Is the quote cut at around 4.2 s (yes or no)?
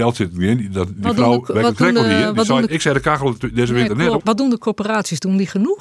yes